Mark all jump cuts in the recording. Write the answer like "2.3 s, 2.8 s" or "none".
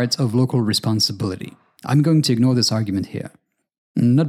1.8 s